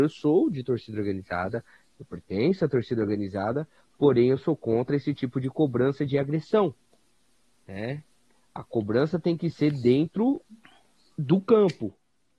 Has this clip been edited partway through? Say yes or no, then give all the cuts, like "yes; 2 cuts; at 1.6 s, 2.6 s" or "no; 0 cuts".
no; 0 cuts